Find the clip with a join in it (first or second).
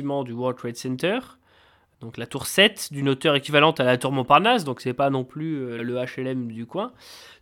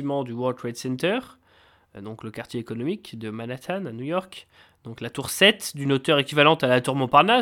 first